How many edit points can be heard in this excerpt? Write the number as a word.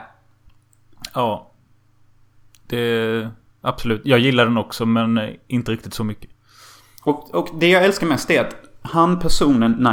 zero